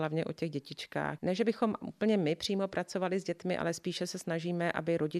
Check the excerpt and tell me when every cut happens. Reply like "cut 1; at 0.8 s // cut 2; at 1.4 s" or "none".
cut 1; at 1.2 s